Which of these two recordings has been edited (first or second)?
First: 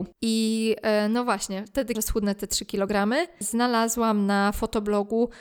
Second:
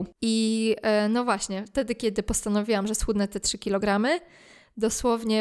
first